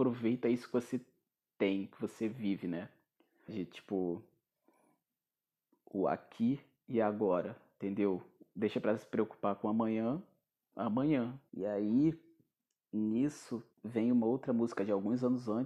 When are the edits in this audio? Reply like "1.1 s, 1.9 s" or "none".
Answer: 3.5 s, 11.5 s, 13.7 s